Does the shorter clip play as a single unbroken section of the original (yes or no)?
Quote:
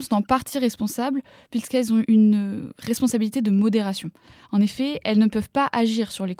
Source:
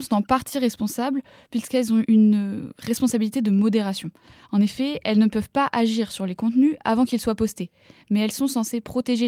yes